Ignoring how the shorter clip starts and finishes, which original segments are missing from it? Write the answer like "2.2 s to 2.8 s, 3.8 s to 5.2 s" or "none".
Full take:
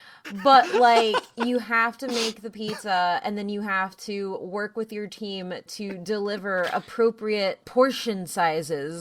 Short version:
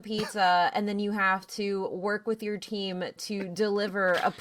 none